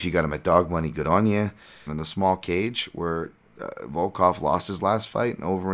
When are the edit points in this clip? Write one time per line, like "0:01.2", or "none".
0:01.9